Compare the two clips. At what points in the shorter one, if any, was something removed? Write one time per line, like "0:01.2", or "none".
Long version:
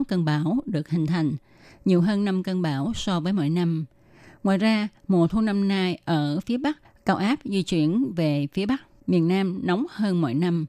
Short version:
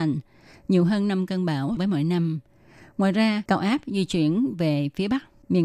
0:01.8
0:03.5